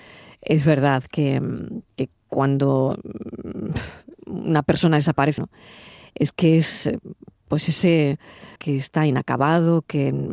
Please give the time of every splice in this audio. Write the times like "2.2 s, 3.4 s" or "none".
5.4 s, 8.6 s